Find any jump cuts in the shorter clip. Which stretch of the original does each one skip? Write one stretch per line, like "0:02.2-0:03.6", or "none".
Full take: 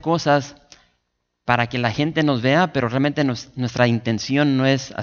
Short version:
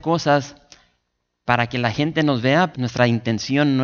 0:02.7-0:03.5